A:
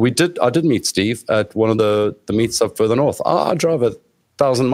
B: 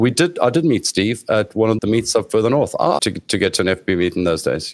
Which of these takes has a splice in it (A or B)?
B